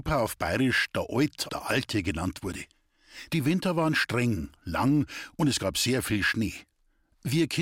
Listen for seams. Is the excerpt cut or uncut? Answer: cut